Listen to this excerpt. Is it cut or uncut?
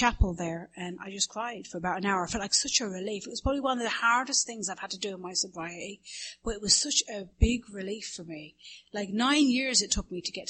uncut